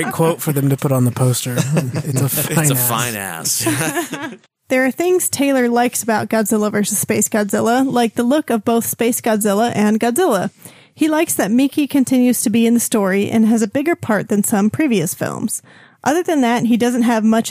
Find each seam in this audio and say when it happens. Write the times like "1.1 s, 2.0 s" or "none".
none